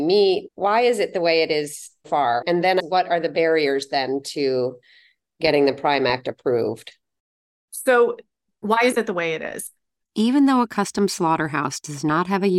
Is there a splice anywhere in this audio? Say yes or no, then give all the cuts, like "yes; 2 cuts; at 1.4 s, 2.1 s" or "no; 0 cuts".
yes; 2 cuts; at 2.0 s, 10.0 s